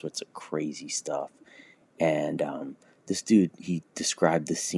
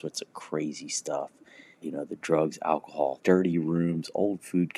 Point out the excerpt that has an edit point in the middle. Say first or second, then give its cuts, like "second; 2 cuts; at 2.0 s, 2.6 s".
second; 2 cuts; at 1.8 s, 3.2 s